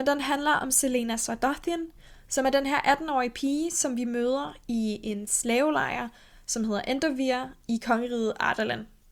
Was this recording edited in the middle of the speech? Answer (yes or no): no